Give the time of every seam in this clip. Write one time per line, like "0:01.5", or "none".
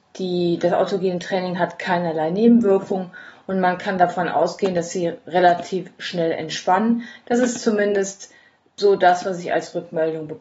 none